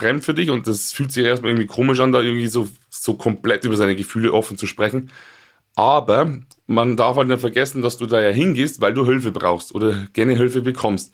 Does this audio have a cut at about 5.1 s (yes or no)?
no